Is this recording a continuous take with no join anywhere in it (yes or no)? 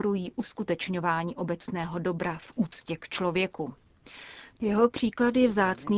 no